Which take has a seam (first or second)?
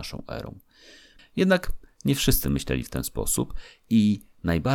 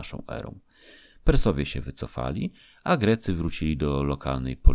first